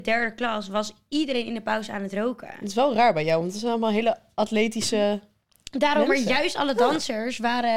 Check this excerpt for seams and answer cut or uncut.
uncut